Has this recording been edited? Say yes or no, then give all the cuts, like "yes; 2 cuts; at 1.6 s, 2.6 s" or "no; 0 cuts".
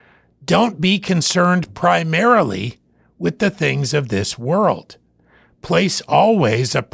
no; 0 cuts